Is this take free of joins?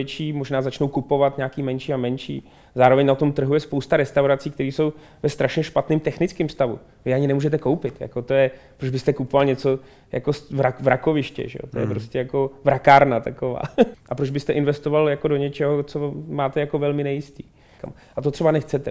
no; 2 cuts; at 13.9 s, 17.8 s

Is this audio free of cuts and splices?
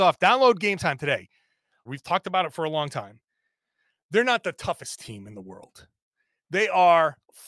no; 1 cut; at 1.9 s

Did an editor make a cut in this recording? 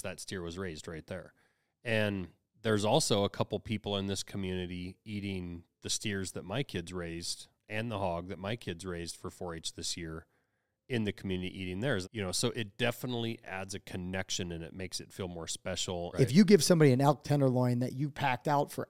yes; 2 cuts; at 12.0 s, 16.1 s

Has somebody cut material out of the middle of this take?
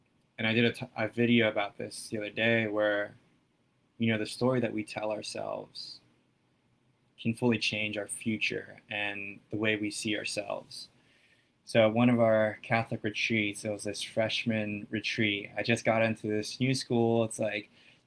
no; 0 cuts

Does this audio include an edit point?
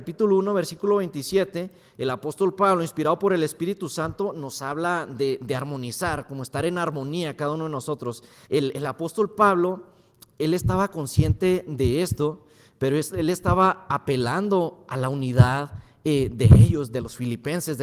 yes; 1 cut; at 8.5 s

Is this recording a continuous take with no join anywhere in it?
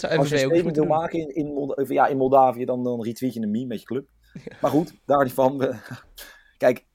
yes; 0 cuts

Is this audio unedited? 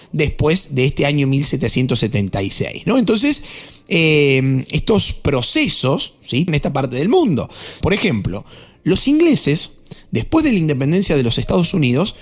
no; 2 cuts; at 6.5 s, 7.8 s

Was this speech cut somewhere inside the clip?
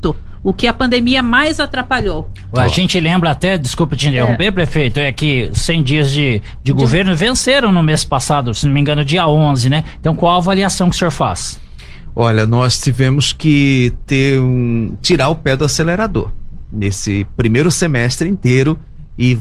no; 0 cuts

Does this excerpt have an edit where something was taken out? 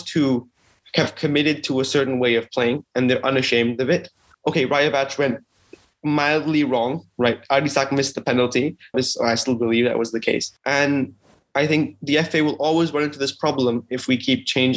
yes; 3 cuts; at 4.3 s, 8.9 s, 10.6 s

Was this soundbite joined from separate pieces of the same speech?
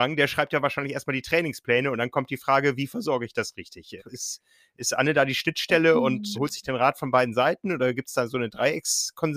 yes; 2 cuts; at 4.0 s, 6.3 s

